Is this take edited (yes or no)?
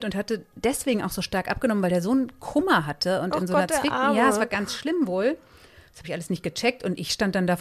no